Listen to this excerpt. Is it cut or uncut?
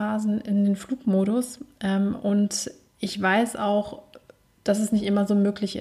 uncut